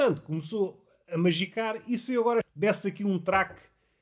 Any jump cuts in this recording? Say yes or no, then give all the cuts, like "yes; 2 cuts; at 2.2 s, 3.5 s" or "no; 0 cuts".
no; 0 cuts